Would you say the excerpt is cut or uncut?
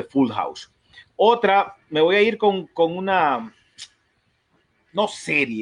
uncut